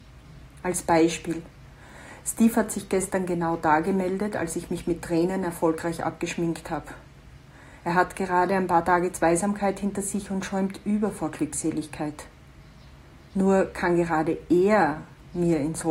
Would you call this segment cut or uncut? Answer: cut